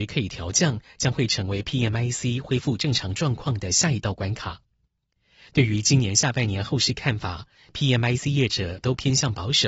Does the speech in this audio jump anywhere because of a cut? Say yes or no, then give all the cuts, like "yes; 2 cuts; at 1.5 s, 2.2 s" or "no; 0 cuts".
no; 0 cuts